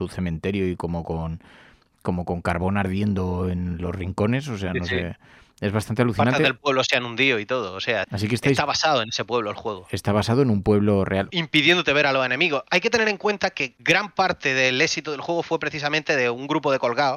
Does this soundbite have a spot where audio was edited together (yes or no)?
yes